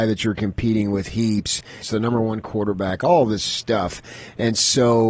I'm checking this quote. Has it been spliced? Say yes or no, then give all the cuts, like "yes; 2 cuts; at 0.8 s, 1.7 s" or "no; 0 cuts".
yes; 1 cut; at 1.8 s